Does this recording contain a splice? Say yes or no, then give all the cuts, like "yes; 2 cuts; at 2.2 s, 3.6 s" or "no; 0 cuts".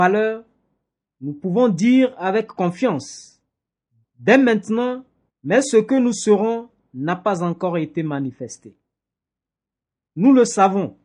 yes; 2 cuts; at 4.0 s, 5.3 s